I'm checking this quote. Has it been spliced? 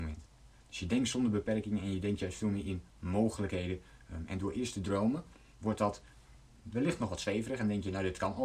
no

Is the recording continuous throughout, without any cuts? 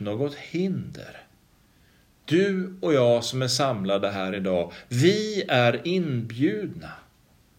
yes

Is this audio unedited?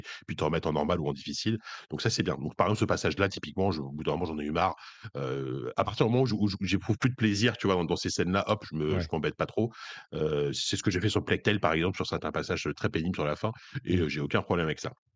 yes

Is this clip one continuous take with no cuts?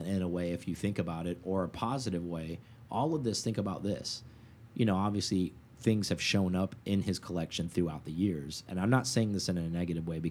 yes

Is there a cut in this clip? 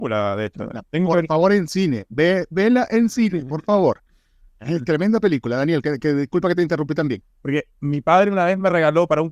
yes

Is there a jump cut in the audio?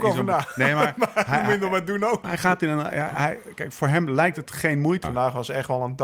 yes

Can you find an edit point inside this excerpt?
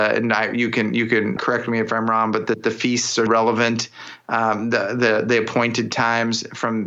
yes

